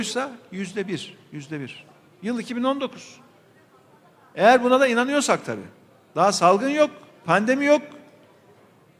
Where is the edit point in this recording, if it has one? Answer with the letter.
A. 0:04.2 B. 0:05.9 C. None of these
C